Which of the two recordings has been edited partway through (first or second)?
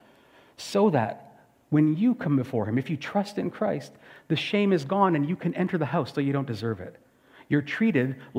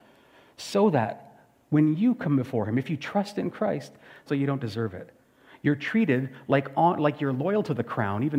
second